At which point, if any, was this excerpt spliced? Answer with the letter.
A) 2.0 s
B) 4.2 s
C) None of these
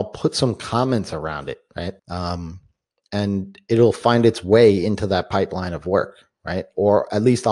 A